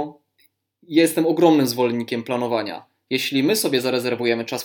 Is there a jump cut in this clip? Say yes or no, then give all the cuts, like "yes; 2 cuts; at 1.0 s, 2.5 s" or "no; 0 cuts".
no; 0 cuts